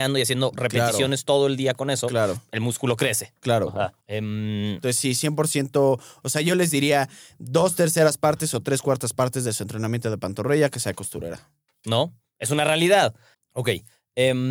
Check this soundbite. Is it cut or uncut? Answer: cut